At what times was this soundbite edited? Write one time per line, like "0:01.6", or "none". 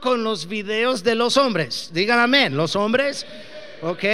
none